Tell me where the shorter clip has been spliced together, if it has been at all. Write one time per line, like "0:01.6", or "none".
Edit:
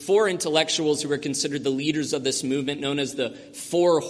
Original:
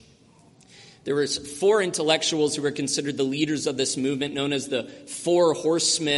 none